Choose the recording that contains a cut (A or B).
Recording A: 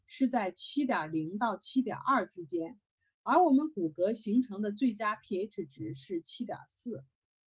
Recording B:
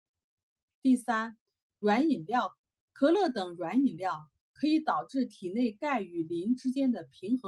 B